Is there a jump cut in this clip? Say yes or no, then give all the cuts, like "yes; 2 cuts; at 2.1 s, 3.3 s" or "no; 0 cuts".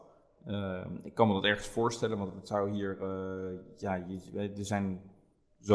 no; 0 cuts